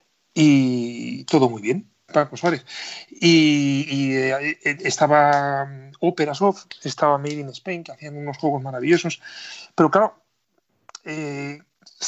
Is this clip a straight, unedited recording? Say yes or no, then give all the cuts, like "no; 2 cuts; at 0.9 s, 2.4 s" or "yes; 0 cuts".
no; 1 cut; at 2.1 s